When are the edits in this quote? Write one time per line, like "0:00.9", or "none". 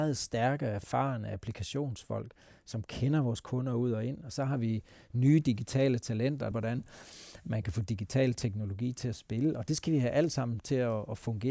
0:06.5